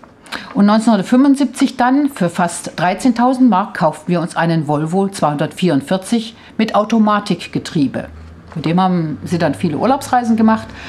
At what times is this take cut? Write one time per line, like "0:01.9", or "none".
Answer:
none

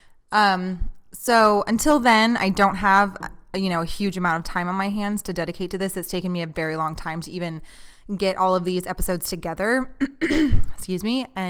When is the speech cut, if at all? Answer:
none

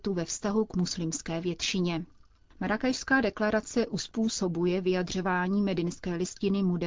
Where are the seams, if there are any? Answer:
none

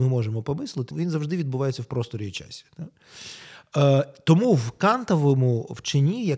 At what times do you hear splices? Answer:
0:00.9

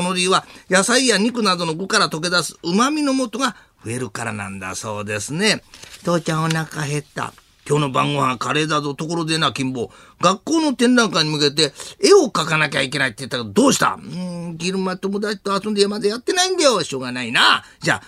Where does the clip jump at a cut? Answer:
none

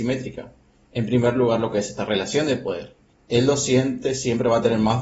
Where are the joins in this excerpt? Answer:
none

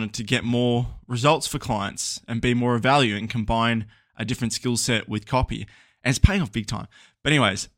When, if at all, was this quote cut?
none

